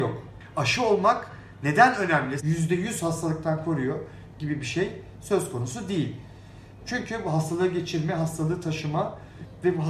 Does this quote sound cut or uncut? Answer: cut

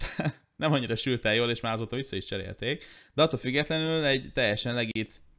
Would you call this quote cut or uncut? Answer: uncut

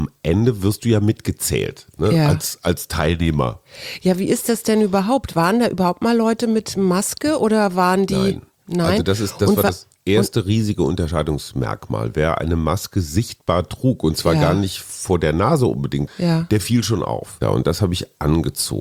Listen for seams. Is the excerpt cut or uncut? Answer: cut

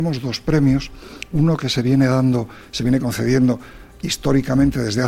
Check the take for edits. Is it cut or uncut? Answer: uncut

